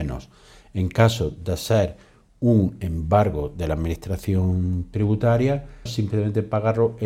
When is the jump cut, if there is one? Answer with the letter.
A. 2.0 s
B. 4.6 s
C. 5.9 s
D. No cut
C